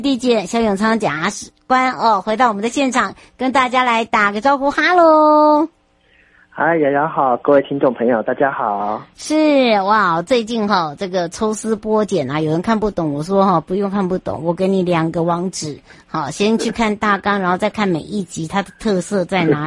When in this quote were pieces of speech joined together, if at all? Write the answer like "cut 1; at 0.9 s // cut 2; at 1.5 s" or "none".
none